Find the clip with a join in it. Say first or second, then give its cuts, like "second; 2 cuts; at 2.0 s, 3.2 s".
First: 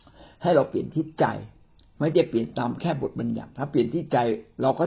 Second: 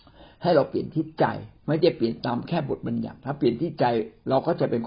second; 1 cut; at 1.6 s